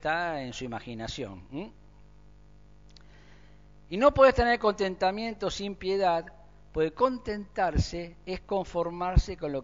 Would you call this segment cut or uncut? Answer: uncut